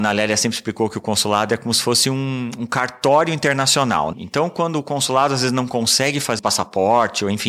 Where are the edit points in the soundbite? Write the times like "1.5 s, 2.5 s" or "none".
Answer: 4.1 s, 6.4 s